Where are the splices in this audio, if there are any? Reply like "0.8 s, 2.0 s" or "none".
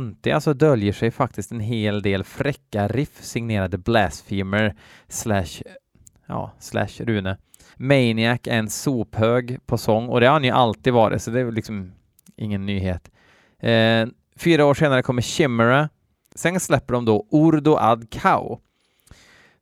7.7 s, 16.3 s